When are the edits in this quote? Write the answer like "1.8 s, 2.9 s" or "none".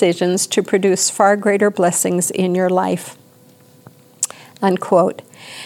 none